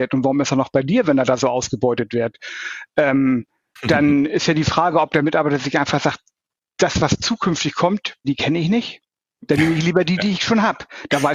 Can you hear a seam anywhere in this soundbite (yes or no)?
yes